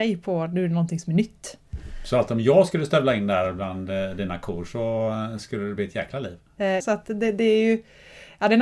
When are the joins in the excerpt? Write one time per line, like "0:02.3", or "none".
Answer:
0:06.8